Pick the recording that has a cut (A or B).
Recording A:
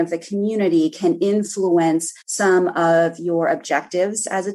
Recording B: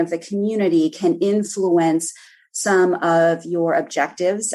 A